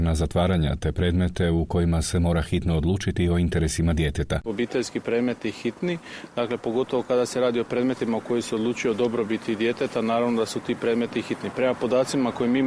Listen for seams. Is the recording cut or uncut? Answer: cut